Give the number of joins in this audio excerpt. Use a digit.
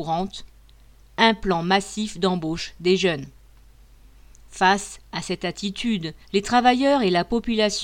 2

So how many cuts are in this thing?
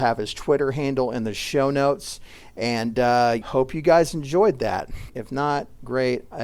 2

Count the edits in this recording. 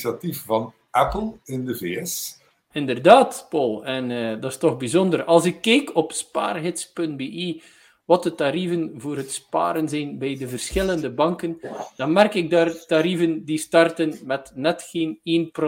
1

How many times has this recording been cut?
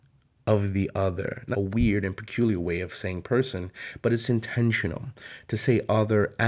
1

